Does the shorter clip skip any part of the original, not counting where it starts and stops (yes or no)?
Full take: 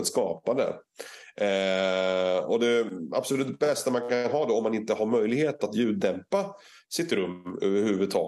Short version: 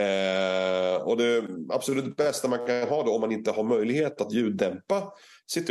no